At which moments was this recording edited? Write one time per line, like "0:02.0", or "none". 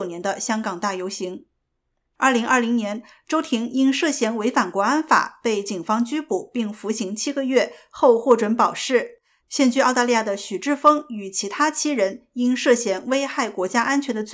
0:09.4